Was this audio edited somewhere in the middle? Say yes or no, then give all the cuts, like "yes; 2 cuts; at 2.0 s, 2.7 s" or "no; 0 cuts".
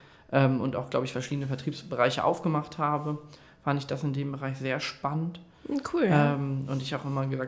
no; 0 cuts